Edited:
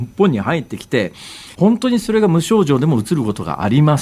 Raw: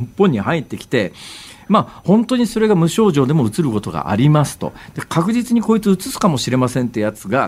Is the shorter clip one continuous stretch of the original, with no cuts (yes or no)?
no